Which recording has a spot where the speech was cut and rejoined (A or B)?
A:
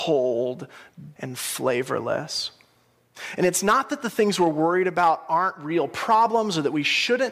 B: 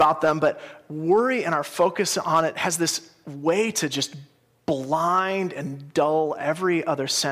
A